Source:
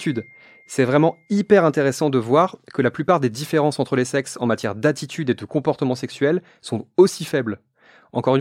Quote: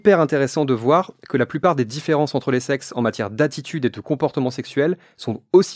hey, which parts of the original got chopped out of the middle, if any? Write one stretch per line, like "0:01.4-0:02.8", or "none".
none